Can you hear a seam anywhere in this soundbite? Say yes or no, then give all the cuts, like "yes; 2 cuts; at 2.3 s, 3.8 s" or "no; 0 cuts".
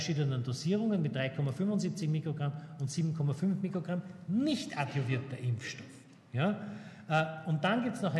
no; 0 cuts